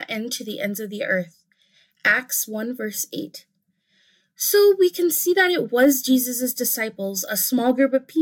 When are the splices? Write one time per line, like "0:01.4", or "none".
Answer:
none